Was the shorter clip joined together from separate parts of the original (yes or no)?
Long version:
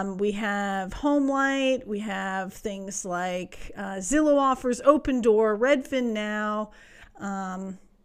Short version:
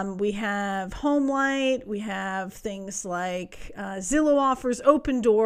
no